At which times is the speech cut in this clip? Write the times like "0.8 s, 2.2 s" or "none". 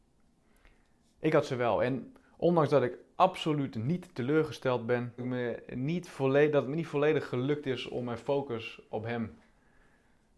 5.2 s